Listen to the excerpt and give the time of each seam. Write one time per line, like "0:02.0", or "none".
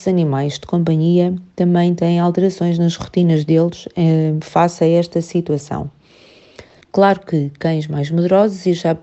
0:06.8